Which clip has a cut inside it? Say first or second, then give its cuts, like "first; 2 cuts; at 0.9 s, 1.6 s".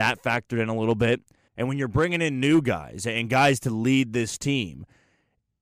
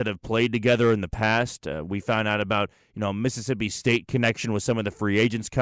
first; 1 cut; at 1.5 s